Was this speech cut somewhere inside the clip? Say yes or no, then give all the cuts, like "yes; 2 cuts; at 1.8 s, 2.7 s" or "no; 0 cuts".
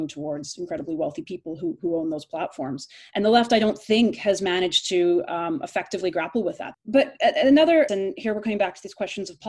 yes; 2 cuts; at 6.7 s, 7.9 s